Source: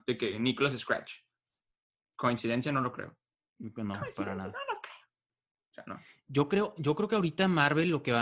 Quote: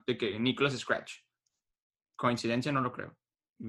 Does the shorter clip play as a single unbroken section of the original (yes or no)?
yes